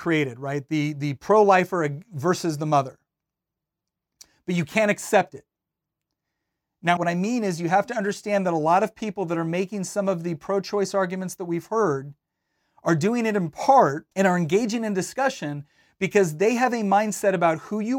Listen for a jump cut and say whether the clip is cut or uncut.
cut